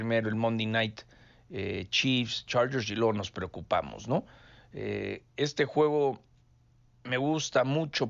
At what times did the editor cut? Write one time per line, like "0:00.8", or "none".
none